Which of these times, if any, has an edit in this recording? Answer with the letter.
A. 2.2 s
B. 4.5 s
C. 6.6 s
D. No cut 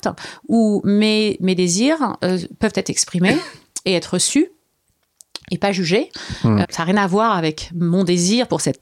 C